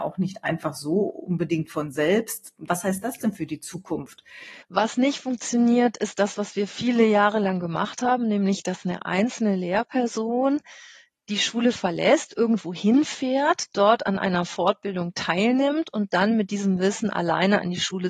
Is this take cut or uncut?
cut